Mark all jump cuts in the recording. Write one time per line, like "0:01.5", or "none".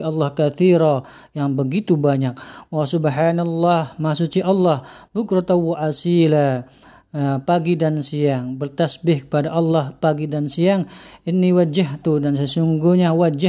none